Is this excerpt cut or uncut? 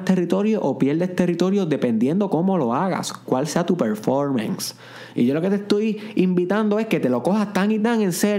uncut